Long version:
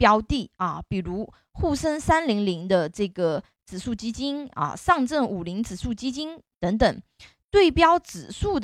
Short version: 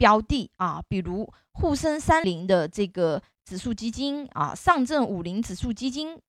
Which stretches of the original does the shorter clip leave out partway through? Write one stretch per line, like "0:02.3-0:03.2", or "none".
0:02.2-0:02.5